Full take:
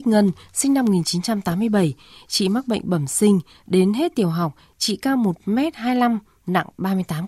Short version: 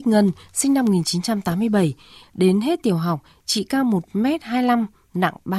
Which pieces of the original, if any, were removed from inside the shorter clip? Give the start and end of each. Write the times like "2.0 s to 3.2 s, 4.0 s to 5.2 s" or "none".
2.2 s to 3.6 s

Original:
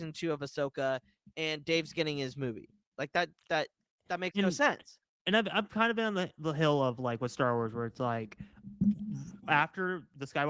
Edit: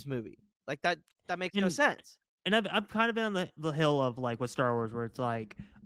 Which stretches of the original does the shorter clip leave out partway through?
3.4 s to 3.9 s

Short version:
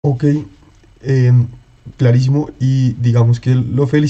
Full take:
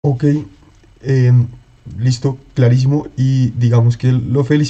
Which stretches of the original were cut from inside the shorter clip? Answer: 1.9 s to 2.5 s

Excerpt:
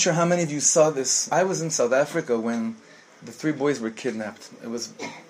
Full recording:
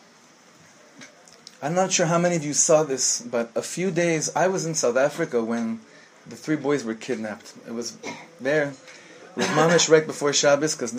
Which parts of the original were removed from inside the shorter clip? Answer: 3.2 s to 4.3 s

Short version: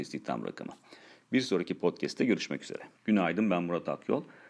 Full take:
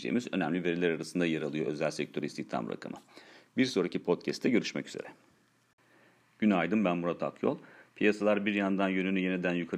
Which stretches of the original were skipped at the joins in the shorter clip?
5.2 s to 6.3 s

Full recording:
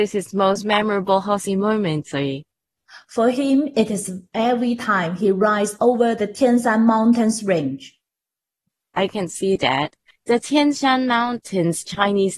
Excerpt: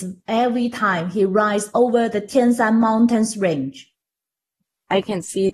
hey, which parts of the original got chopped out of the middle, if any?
none

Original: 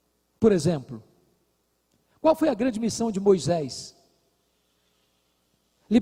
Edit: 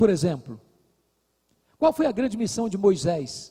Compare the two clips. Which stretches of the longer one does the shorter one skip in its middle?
none

